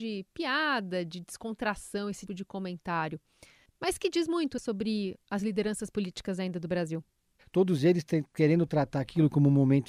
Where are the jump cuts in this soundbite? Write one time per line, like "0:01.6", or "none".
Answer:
0:02.3
0:07.4